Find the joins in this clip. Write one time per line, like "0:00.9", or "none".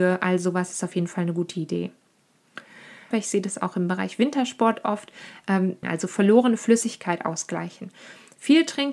0:03.1
0:05.8

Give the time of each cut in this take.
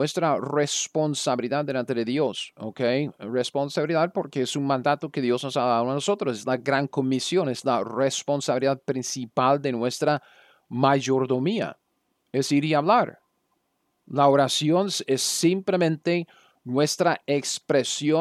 none

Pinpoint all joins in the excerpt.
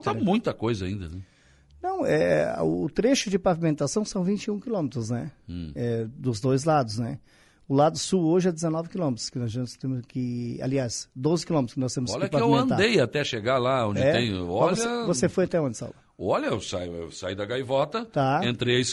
none

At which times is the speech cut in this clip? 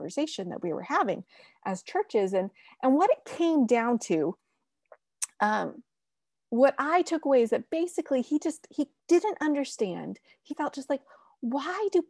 0:09.0
0:10.5

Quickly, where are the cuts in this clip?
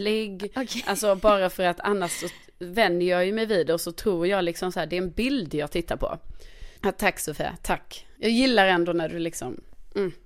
0:06.8

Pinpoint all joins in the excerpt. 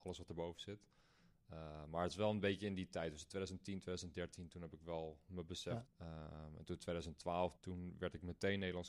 0:05.8
0:07.6

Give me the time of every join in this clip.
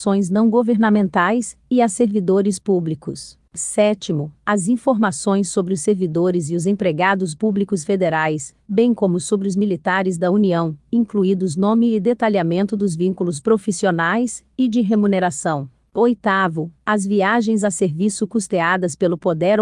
0:03.5

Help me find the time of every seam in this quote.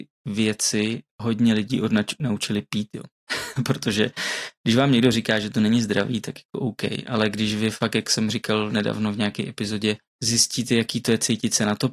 none

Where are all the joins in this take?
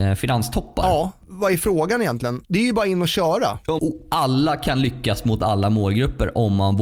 0:02.5
0:03.8

